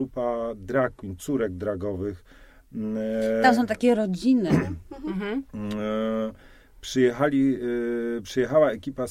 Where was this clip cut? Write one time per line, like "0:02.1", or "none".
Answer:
none

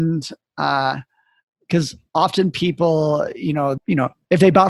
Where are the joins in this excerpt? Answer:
0:03.8

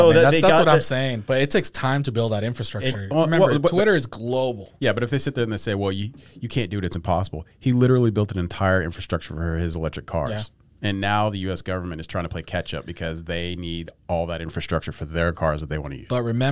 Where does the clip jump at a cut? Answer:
none

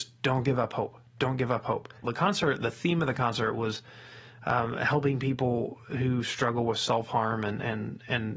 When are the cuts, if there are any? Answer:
0:02.0

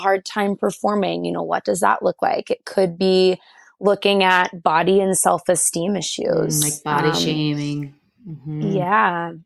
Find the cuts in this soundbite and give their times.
none

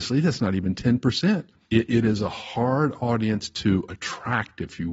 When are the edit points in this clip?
0:01.7

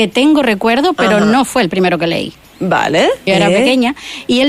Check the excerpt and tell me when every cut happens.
0:03.3

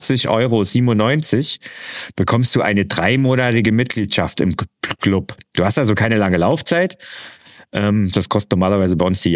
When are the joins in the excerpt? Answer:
0:08.1

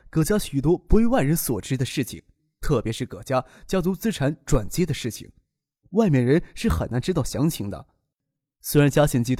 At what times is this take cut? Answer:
none

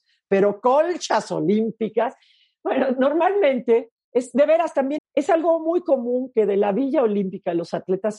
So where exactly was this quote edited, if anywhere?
0:05.0

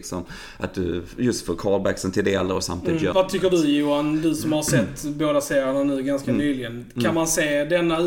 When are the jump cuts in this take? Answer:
0:03.1

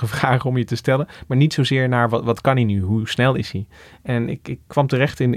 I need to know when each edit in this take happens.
none

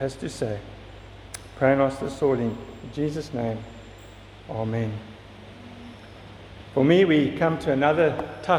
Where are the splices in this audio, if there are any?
none

